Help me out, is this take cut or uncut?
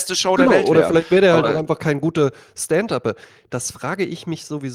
uncut